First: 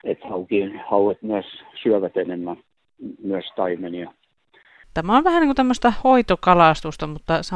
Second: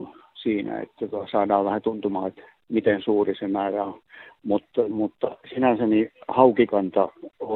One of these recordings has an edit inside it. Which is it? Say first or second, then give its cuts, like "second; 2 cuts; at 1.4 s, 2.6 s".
first; 1 cut; at 4.8 s